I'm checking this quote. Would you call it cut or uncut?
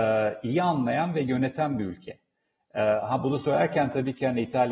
uncut